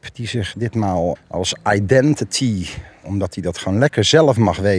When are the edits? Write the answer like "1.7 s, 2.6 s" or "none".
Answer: 1.2 s